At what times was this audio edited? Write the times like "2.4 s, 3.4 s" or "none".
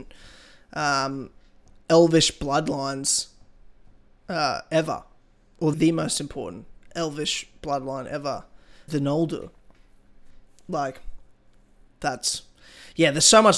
5.7 s, 8.9 s